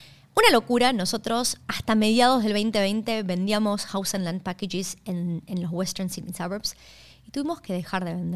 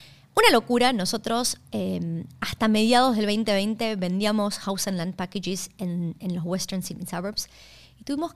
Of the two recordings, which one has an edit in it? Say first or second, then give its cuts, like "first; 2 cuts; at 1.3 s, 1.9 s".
first; 1 cut; at 1.6 s